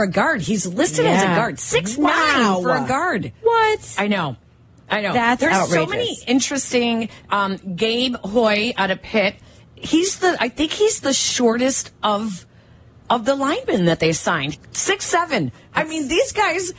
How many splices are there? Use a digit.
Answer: 1